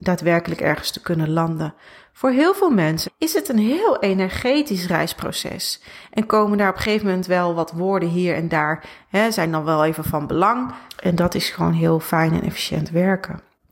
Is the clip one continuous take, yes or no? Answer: no